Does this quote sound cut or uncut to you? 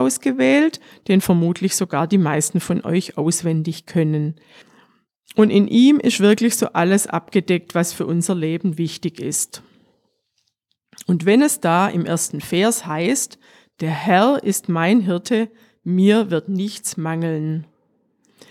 uncut